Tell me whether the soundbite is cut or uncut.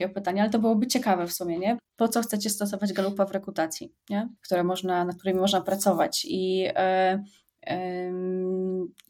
cut